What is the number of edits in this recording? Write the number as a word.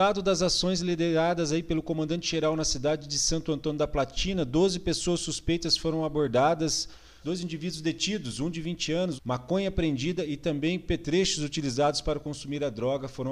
two